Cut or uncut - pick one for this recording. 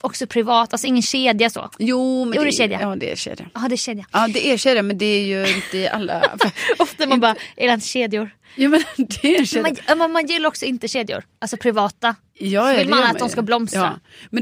uncut